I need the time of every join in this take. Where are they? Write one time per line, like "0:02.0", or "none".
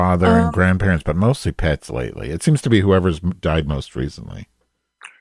none